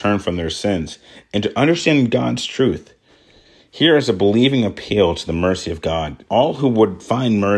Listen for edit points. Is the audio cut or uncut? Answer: cut